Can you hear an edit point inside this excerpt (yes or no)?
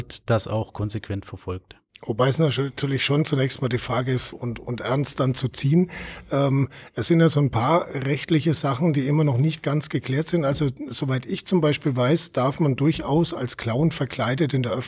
yes